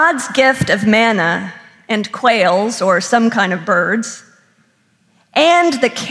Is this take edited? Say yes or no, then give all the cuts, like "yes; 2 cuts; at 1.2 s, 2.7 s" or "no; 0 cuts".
no; 0 cuts